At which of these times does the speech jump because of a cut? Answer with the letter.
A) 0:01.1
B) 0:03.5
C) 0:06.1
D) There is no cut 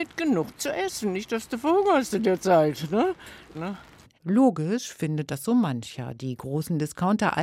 B